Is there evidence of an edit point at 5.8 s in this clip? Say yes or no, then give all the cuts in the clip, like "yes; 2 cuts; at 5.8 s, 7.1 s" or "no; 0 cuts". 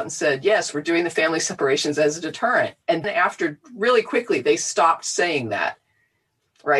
no; 1 cut; at 3.0 s